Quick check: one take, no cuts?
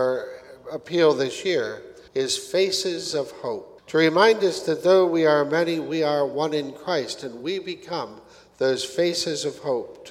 no; 2 cuts; at 2.1 s, 3.8 s

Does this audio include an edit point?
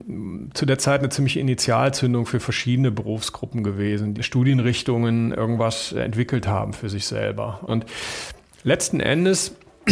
yes; 2 cuts; at 4.1 s, 7.7 s

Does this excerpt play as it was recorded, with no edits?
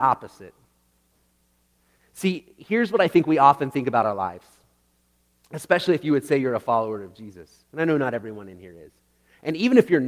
no; 1 cut; at 2.0 s

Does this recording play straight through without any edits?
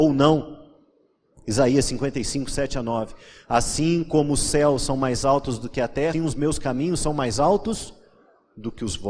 no; 1 cut; at 6.1 s

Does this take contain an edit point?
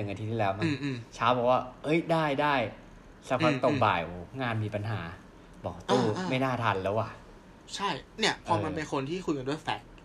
no; 0 cuts

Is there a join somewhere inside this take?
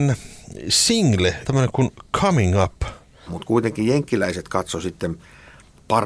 yes; 2 cuts; at 1.4 s, 3.3 s

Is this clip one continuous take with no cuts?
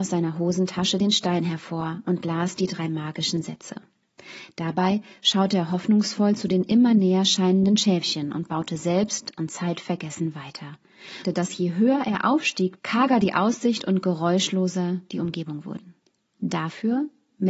no; 2 cuts; at 11.2 s, 12.8 s

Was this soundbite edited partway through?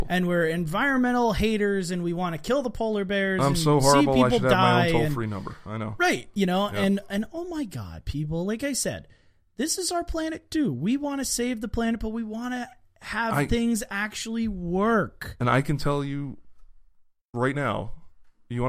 no; 0 cuts

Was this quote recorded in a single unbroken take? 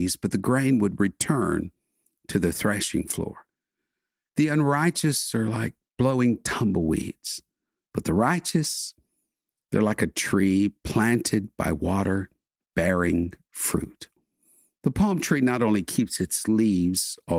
yes; 0 cuts

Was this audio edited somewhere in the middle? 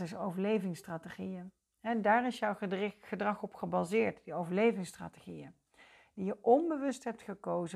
no; 0 cuts

